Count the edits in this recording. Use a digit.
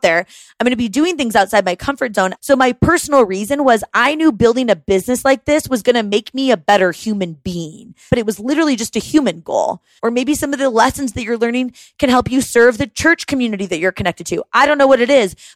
3